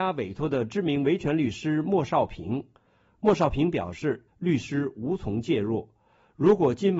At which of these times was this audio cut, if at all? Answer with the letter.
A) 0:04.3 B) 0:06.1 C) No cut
A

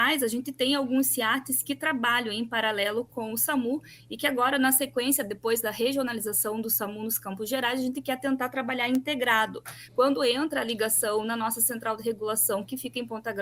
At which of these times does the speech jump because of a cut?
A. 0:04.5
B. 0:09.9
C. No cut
B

